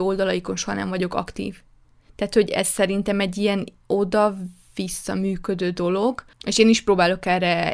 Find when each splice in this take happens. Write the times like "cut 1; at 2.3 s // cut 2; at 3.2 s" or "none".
cut 1; at 6.4 s

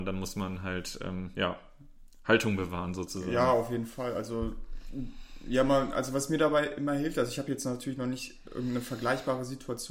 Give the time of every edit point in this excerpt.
none

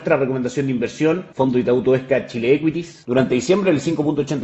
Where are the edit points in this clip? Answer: cut 1; at 3.0 s

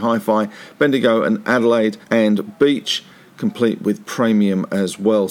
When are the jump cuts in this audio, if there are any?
cut 1; at 2.0 s

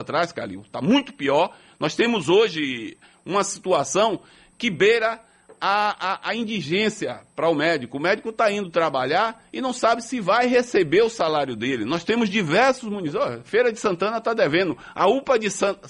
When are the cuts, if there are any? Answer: none

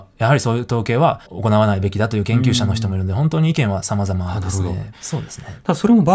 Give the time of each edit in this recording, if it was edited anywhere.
cut 1; at 1.3 s // cut 2; at 4.9 s

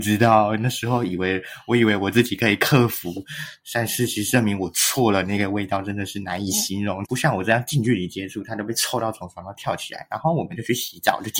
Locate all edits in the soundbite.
cut 1; at 7.0 s

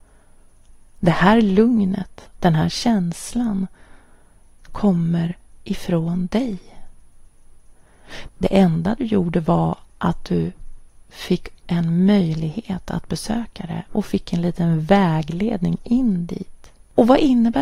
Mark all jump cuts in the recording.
cut 1; at 2.3 s // cut 2; at 8.3 s

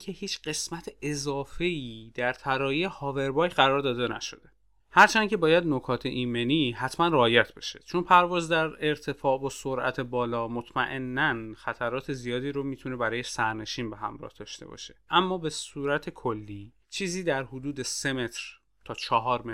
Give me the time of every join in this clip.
cut 1; at 15.1 s // cut 2; at 16.8 s

